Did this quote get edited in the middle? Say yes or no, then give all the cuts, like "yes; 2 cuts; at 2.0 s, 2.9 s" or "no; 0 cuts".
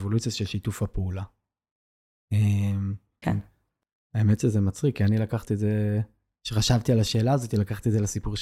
yes; 1 cut; at 3.2 s